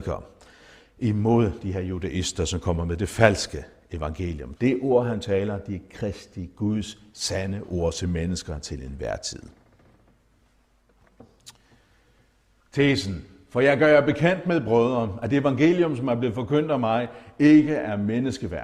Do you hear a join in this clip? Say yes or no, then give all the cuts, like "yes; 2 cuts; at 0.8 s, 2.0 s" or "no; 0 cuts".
yes; 1 cut; at 4.6 s